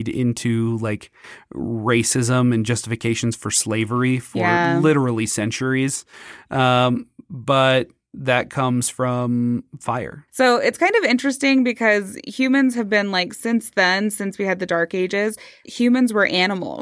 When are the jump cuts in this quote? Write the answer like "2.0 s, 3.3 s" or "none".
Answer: 10.3 s, 15.6 s